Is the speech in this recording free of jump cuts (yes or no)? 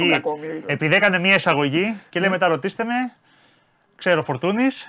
yes